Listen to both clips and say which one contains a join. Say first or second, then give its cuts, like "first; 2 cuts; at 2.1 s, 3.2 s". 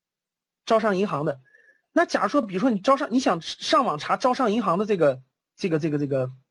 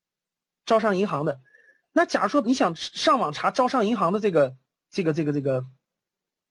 second; 1 cut; at 2.4 s